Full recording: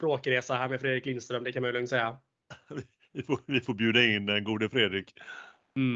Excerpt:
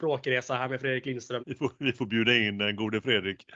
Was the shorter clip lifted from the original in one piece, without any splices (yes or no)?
no